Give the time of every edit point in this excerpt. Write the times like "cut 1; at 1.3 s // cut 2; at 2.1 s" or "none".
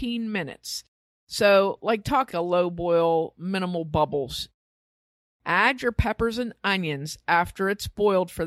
cut 1; at 2.3 s